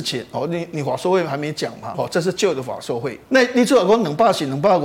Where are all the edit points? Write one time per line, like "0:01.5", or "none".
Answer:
0:01.9
0:03.2

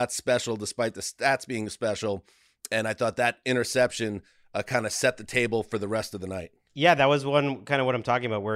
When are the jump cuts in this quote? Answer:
none

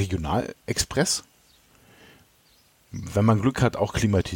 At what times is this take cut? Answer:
none

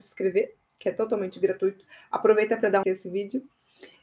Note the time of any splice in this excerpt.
0:02.8

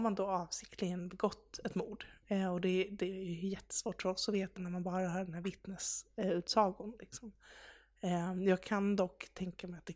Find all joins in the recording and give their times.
0:04.6

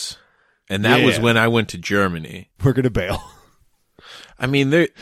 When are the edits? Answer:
0:02.6

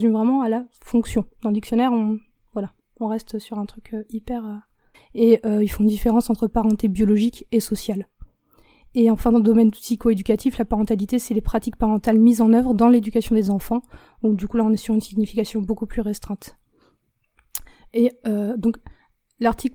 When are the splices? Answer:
0:04.9

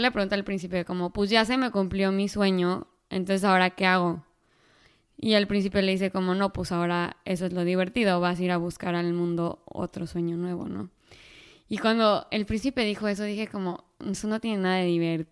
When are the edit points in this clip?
0:13.9

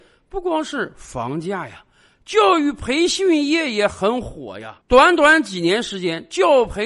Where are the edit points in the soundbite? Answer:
0:04.8

